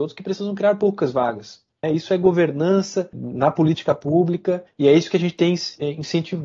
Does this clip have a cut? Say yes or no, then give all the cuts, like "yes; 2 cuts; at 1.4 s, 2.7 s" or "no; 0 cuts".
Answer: yes; 1 cut; at 1.8 s